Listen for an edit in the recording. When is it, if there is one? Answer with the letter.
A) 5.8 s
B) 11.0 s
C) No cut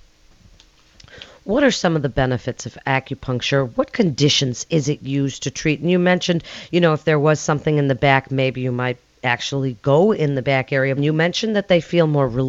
B